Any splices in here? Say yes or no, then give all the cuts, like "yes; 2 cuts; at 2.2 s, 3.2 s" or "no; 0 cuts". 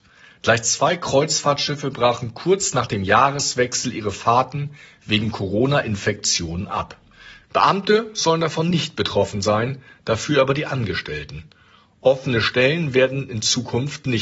yes; 1 cut; at 7.4 s